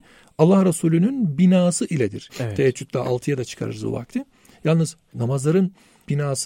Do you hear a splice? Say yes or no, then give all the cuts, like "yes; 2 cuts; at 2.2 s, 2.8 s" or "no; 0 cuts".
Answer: yes; 1 cut; at 2.3 s